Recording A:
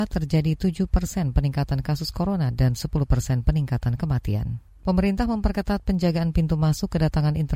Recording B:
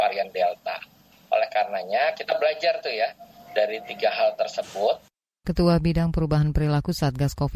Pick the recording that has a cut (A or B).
A